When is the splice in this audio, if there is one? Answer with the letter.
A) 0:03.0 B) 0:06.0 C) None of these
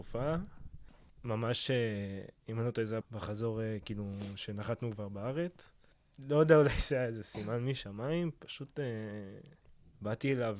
A